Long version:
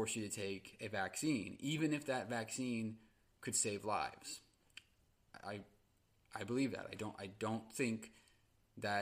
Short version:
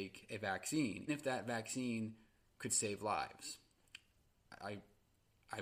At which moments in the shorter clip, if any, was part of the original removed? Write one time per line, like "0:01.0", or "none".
0:01.1